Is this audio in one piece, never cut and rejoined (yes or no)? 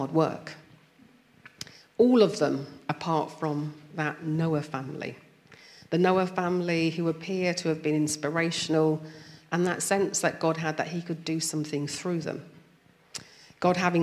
yes